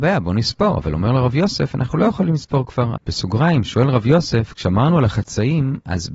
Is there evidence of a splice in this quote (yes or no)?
yes